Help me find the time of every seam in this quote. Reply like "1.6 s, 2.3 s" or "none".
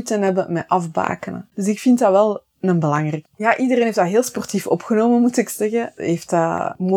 1.5 s, 3.3 s